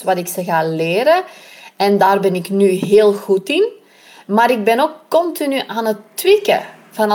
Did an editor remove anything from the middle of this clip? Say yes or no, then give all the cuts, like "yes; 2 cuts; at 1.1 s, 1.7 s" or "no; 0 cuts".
no; 0 cuts